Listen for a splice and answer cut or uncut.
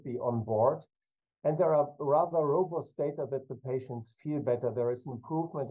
uncut